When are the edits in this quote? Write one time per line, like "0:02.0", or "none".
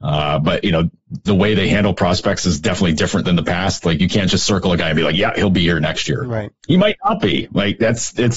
none